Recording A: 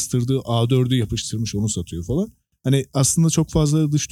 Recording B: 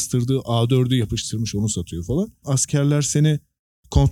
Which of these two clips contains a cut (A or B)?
B